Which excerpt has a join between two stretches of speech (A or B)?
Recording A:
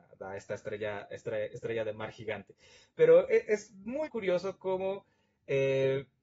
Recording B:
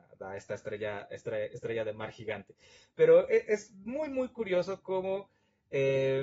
A